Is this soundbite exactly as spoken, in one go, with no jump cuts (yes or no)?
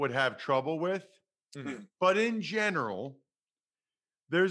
yes